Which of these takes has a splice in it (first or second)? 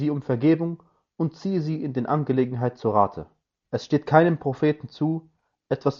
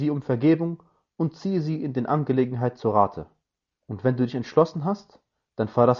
first